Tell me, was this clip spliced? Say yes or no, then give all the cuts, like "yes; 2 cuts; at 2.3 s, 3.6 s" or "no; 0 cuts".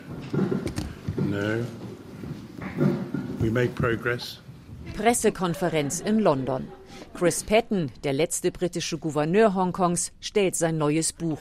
no; 0 cuts